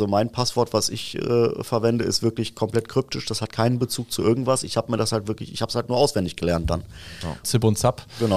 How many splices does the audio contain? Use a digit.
1